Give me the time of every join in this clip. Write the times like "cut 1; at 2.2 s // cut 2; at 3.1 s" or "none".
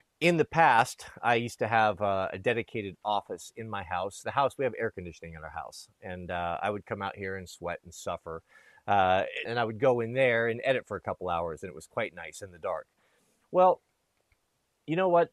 cut 1; at 9.5 s